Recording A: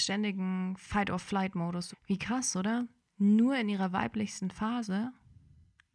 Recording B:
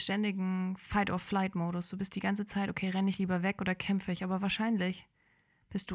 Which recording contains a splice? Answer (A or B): A